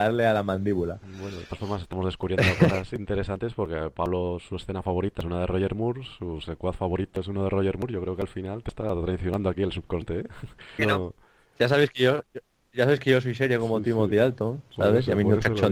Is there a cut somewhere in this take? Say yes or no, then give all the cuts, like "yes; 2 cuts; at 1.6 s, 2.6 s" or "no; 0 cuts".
yes; 1 cut; at 10.8 s